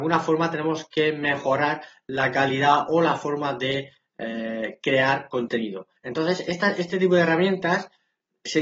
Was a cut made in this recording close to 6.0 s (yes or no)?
yes